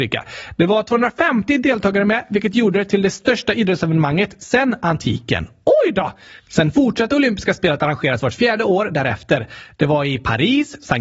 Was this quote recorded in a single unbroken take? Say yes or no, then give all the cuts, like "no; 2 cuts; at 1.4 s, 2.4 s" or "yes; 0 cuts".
yes; 0 cuts